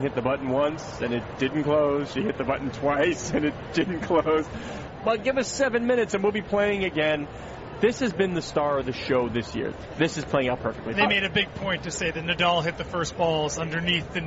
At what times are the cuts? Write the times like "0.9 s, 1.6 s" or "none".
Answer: 4.9 s

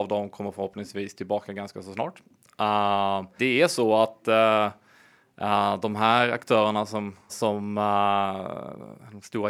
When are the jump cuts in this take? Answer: 3.4 s, 7.3 s

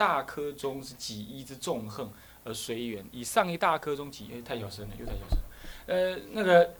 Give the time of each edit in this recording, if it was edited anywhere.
none

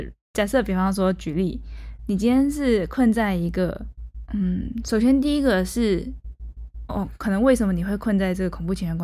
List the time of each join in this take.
4.3 s

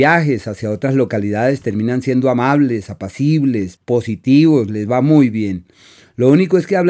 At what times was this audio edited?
3.8 s

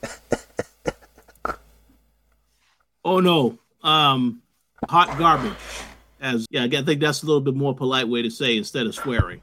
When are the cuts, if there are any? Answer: 4.9 s, 6.5 s

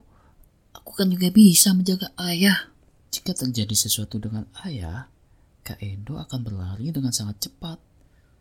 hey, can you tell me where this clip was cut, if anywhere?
3.0 s

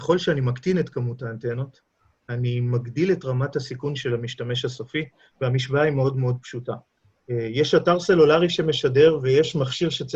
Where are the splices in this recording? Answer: none

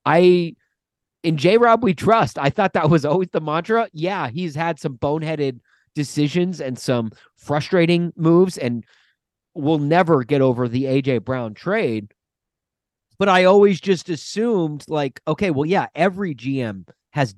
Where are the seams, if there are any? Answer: none

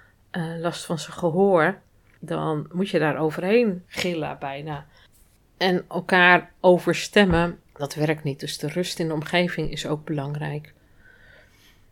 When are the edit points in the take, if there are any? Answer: none

